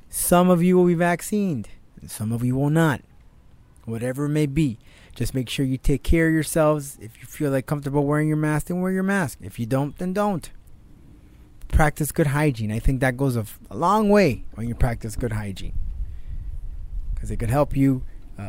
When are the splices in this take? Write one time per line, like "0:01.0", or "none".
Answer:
none